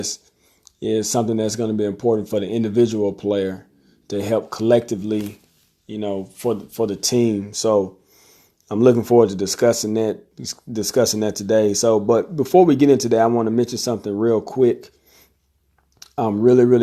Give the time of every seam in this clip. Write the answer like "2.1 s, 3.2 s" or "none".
none